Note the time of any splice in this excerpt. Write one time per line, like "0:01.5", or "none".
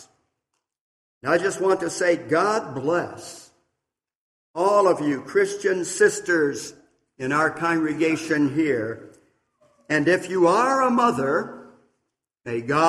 none